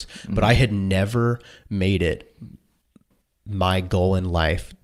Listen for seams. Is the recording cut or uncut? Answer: uncut